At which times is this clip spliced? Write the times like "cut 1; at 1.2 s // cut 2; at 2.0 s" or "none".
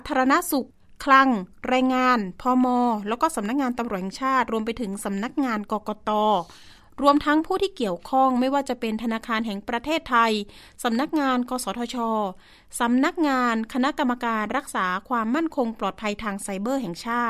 none